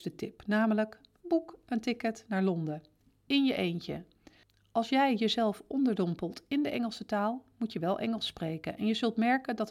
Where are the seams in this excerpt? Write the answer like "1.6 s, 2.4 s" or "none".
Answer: none